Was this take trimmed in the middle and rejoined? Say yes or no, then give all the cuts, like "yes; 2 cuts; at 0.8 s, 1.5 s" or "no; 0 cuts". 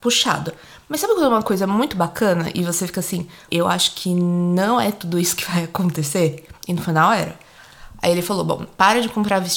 yes; 1 cut; at 3.5 s